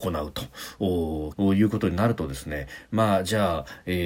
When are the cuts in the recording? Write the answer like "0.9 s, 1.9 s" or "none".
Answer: 1.3 s